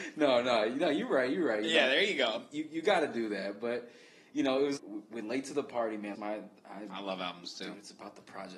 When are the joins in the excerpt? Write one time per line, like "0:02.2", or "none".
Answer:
0:04.8
0:06.1